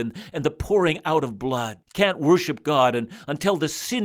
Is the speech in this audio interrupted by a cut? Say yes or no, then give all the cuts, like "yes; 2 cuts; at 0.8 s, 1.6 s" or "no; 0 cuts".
yes; 1 cut; at 1.8 s